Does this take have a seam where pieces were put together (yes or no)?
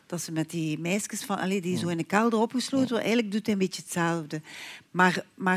no